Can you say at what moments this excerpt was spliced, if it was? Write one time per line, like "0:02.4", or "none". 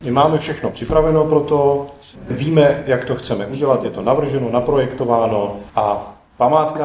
none